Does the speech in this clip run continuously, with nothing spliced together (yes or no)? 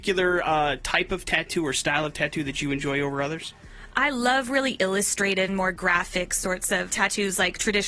no